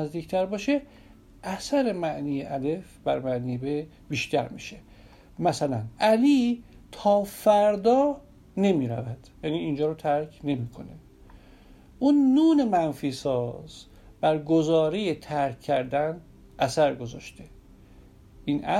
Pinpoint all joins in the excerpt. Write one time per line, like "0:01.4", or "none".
0:05.9
0:09.3